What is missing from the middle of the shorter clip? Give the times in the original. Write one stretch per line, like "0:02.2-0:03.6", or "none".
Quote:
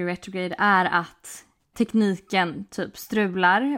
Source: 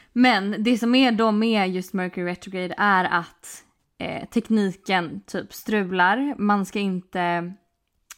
0:03.9-0:04.3